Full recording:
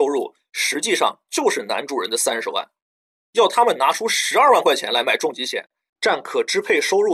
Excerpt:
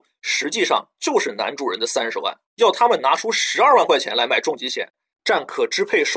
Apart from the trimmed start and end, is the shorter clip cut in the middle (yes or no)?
yes